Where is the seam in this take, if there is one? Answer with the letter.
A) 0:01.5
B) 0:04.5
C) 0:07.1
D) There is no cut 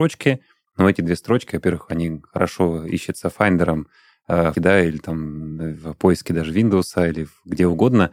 B